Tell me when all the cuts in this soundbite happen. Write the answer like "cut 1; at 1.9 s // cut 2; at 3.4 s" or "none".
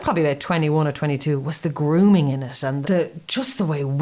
cut 1; at 2.8 s